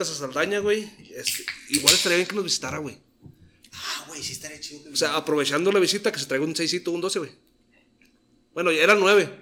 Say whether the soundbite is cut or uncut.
uncut